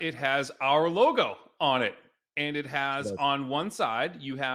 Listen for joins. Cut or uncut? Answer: uncut